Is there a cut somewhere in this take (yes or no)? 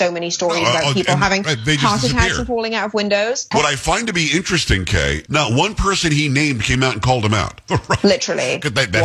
yes